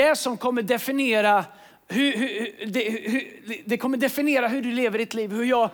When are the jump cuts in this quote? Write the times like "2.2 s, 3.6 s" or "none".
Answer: none